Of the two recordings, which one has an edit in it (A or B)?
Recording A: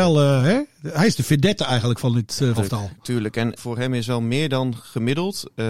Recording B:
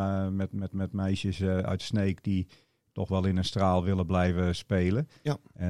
A